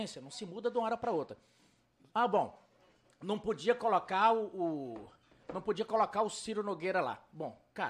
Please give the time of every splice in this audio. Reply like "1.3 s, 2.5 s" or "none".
none